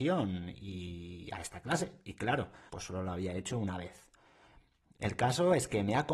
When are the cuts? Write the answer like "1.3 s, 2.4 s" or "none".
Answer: 2.7 s